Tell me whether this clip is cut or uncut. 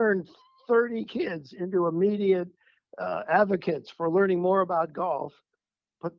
uncut